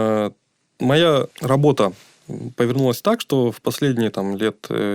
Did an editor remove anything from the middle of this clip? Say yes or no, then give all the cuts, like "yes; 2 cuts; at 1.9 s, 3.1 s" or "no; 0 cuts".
yes; 1 cut; at 1.3 s